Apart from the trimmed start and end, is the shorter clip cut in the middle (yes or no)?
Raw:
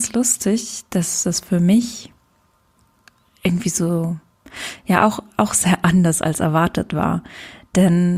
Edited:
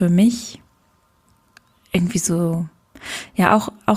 no